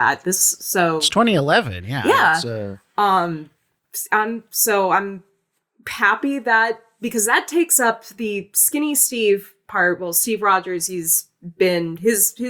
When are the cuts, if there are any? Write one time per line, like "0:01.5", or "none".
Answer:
none